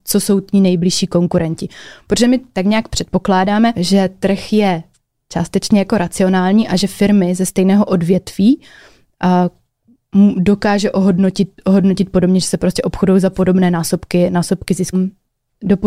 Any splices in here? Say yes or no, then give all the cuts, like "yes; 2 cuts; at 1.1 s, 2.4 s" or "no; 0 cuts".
yes; 2 cuts; at 3.7 s, 14.9 s